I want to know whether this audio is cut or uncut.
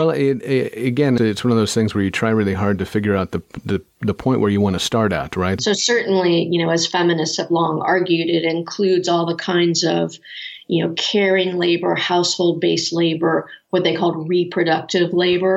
cut